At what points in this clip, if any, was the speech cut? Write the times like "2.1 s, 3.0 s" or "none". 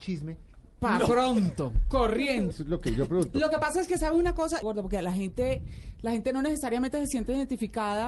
2.5 s, 4.6 s